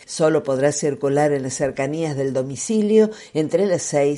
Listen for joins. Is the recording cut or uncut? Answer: uncut